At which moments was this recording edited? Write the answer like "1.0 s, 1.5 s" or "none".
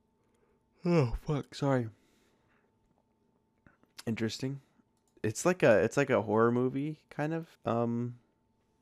5.2 s, 7.5 s